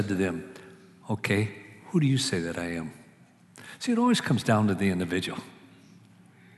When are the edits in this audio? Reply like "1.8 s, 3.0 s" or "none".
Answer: none